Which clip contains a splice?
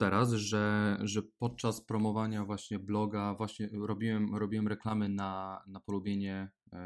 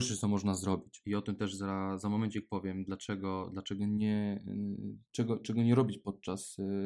second; 1 cut; at 1.0 s

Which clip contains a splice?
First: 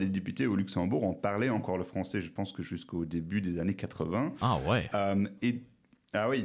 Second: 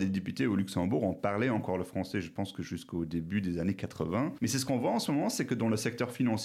second; 1 cut; at 4.4 s

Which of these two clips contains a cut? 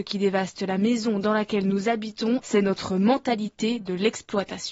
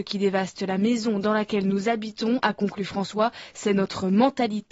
first; 1 cut; at 2.4 s

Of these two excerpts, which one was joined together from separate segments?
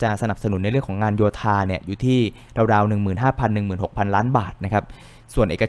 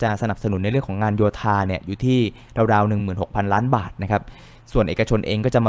second; 1 cut; at 3.0 s

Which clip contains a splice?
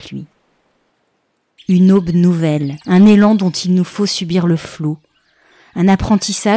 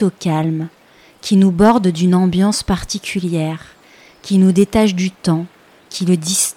first; 2 cuts; at 1.6 s, 2.8 s

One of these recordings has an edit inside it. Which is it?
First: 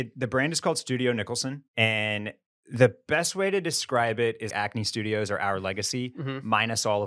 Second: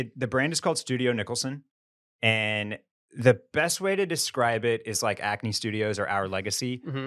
first; 2 cuts; at 1.7 s, 4.5 s

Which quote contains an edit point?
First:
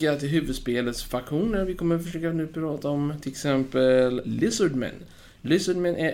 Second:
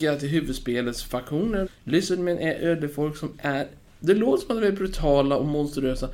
second; 1 cut; at 1.7 s

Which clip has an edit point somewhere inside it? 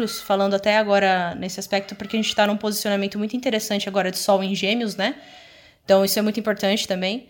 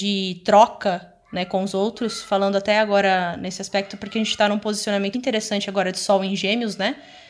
second; 1 cut; at 5.1 s

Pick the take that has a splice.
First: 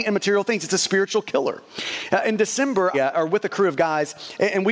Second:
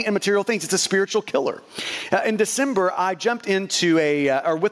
first; 1 cut; at 2.9 s

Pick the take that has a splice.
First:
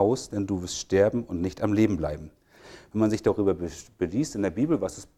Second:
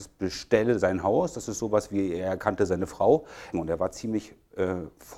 second; 1 cut; at 3.5 s

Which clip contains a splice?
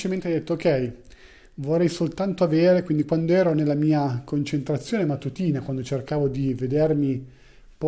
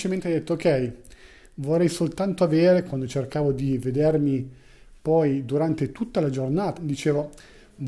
second; 2 cuts; at 2.9 s, 6.8 s

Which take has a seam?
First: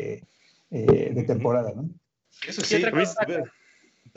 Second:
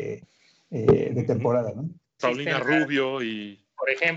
second; 1 cut; at 2.2 s

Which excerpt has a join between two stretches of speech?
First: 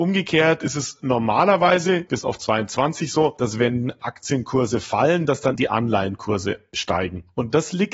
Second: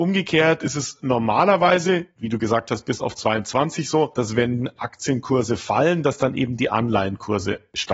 first; 2 cuts; at 2.1 s, 5.6 s

